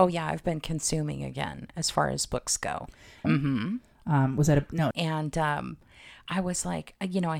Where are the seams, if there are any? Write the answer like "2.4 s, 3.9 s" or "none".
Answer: 3.2 s, 4.9 s